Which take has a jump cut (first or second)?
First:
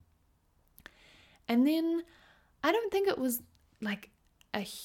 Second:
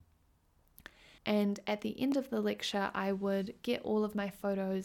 second